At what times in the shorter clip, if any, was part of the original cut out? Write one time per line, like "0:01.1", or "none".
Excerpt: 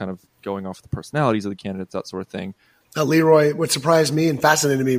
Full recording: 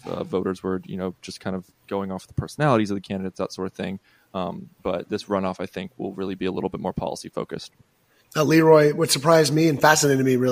0:02.8